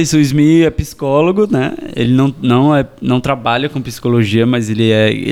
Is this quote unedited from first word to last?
yes; 0 cuts

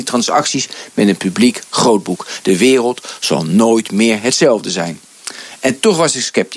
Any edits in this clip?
no; 0 cuts

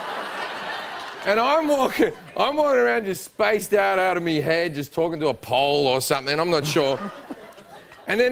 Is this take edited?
no; 0 cuts

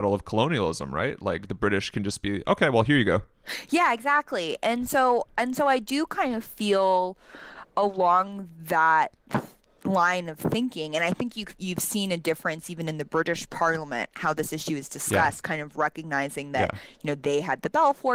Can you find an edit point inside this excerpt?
no; 0 cuts

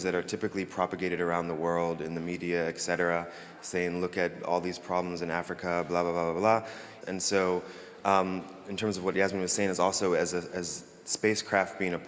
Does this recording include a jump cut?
yes; 1 cut; at 7.0 s

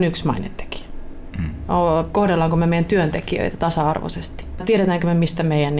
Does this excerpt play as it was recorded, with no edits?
no; 2 cuts; at 1.3 s, 4.6 s

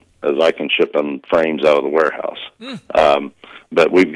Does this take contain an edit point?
no; 0 cuts

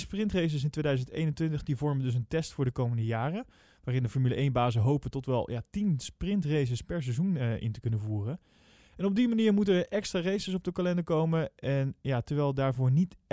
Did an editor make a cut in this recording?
no; 0 cuts

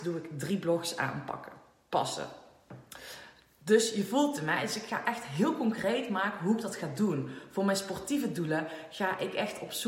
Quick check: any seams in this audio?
no; 0 cuts

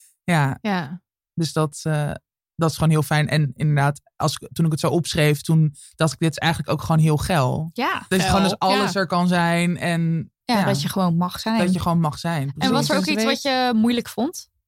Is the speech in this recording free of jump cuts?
no; 2 cuts; at 8.1 s, 10.4 s

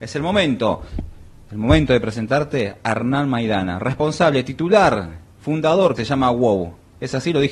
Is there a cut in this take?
yes; 1 cut; at 6.0 s

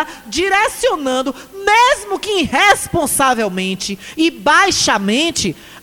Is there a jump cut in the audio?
no; 0 cuts

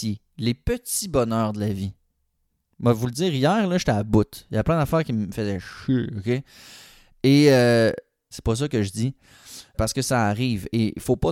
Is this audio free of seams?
no; 2 cuts; at 8.3 s, 9.7 s

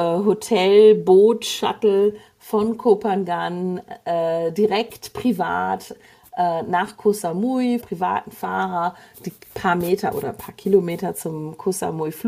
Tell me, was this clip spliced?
yes; 1 cut; at 7.8 s

